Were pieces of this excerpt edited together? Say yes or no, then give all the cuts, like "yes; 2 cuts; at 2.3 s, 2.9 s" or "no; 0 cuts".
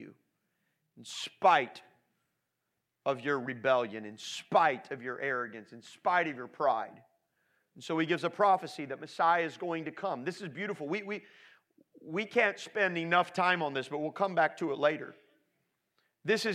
no; 0 cuts